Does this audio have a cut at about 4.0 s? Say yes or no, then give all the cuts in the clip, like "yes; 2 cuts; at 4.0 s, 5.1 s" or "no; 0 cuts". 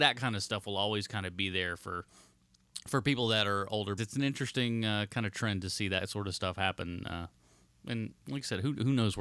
yes; 1 cut; at 4.0 s